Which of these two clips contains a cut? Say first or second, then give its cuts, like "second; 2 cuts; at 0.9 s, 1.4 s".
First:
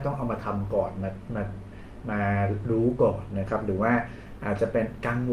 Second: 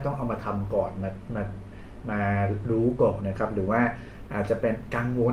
second; 1 cut; at 3.2 s